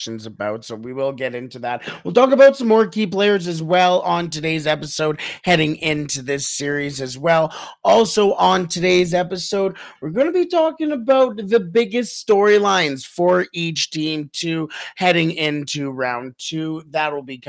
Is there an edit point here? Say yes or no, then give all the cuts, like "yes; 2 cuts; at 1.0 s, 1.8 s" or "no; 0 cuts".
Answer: no; 0 cuts